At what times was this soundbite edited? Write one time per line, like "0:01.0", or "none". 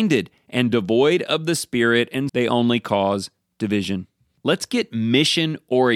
0:02.3
0:04.4